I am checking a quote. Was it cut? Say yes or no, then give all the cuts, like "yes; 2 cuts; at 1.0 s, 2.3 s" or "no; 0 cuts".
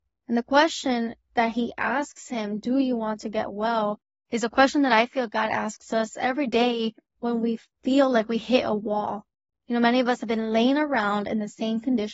yes; 1 cut; at 1.2 s